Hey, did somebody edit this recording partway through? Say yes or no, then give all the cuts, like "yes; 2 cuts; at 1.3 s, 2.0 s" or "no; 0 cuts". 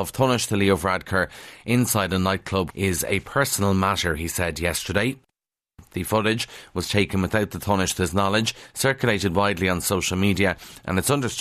yes; 1 cut; at 2.7 s